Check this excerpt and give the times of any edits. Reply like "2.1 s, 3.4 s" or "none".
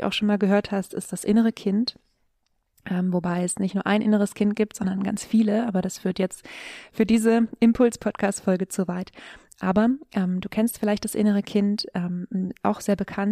none